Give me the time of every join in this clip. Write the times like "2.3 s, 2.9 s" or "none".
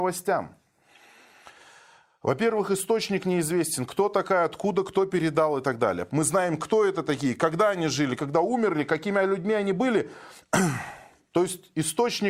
6.1 s, 8.2 s, 10.4 s